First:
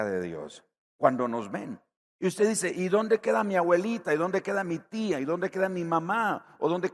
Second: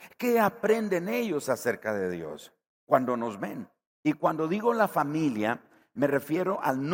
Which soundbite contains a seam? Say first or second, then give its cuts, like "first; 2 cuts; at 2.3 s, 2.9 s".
first; 1 cut; at 2.0 s